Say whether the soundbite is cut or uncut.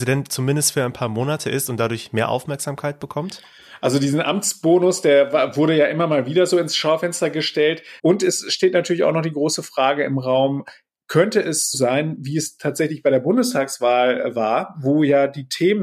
cut